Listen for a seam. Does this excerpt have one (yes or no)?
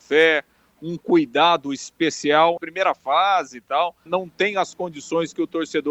yes